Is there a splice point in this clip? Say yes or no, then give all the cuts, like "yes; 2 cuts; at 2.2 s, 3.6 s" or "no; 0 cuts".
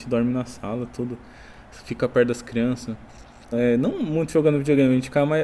yes; 1 cut; at 3.5 s